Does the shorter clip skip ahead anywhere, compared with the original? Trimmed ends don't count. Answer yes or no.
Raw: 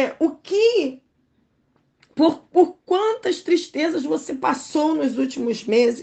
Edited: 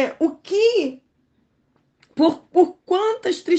no